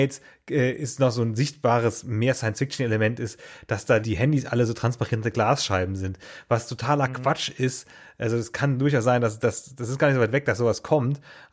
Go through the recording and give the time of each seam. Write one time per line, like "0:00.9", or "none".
0:04.0